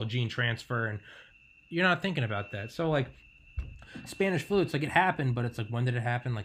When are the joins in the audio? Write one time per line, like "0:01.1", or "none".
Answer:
none